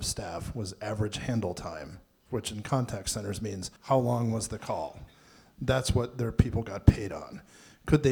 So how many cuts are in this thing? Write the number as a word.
one